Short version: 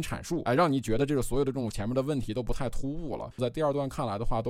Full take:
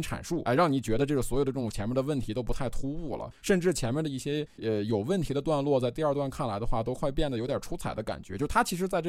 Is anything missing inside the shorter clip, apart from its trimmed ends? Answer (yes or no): yes